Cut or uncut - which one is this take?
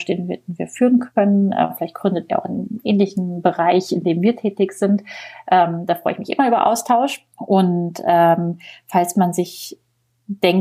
cut